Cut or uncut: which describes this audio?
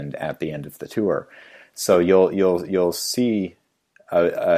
uncut